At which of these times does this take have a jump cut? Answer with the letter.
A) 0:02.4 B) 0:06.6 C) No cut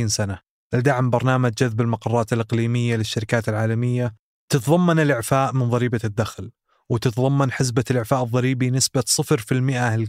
C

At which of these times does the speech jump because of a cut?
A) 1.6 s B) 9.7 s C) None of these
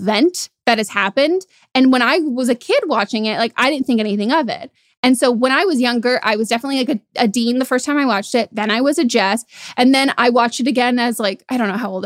C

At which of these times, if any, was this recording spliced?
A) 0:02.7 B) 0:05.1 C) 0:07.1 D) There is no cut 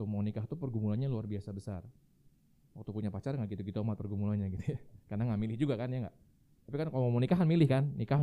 D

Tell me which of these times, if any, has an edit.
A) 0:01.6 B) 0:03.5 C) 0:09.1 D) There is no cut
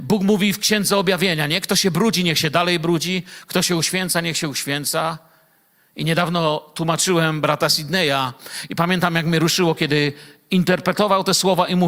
D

